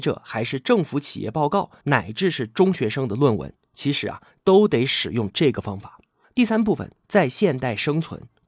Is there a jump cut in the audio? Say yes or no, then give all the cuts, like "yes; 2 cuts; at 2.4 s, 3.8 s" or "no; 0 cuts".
yes; 2 cuts; at 1.8 s, 6.2 s